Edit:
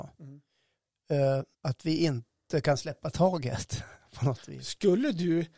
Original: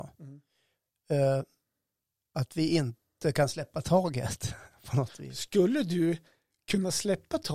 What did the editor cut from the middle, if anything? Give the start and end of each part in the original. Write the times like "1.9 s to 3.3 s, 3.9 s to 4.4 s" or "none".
1.5 s to 2.2 s